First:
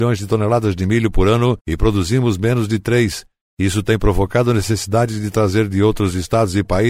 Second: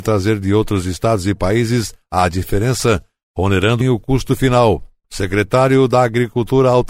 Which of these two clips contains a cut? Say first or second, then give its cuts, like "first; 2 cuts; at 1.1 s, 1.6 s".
second; 1 cut; at 3.8 s